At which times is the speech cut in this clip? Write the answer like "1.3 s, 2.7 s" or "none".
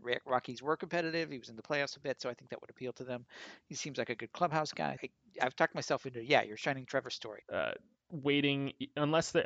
5.0 s, 7.4 s